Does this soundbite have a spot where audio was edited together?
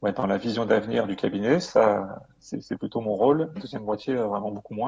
yes; 1 cut; at 3.6 s

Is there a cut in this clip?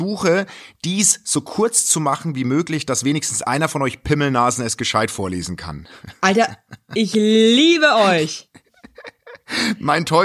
no; 0 cuts

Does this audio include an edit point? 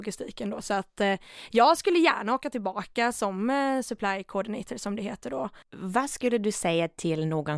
yes; 1 cut; at 5.6 s

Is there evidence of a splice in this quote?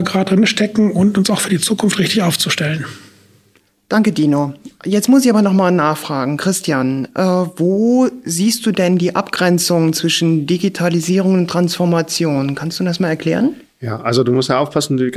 no; 0 cuts

